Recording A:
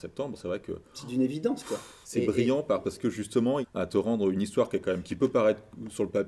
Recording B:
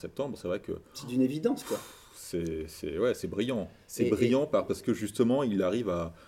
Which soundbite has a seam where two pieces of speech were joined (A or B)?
A